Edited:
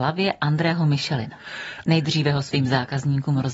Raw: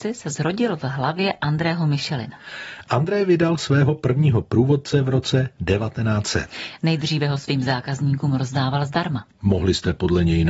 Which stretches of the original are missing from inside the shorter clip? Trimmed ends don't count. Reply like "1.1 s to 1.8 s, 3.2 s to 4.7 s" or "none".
2.8 s to 6.8 s